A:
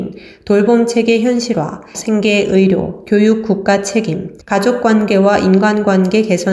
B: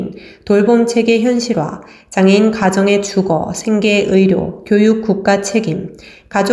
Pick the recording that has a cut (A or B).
A